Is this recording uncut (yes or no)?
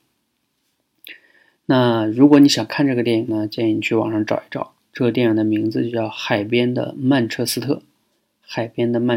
yes